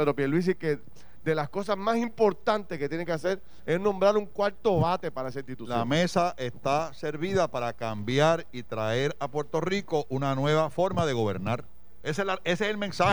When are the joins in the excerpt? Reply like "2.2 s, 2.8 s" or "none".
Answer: 12.0 s